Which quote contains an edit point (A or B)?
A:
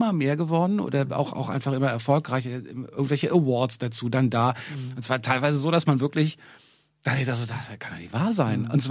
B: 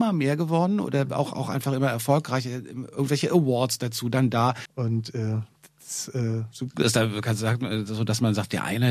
B